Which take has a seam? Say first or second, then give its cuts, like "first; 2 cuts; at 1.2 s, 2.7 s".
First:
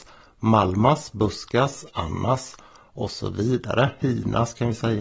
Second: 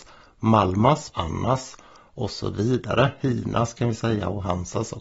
second; 1 cut; at 1.1 s